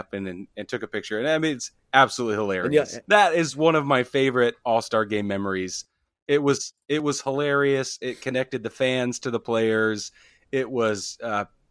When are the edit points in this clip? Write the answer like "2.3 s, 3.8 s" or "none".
3.0 s